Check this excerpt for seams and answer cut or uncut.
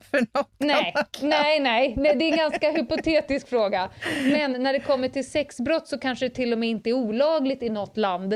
uncut